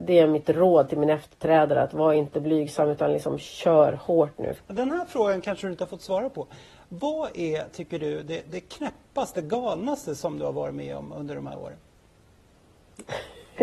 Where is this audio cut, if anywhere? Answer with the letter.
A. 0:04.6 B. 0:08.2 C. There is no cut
A